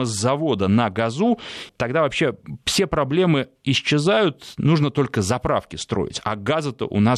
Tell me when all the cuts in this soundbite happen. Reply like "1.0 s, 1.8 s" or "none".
1.7 s